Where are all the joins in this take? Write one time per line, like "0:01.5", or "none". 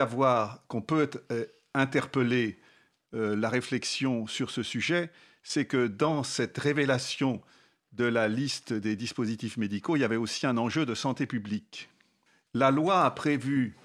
0:12.5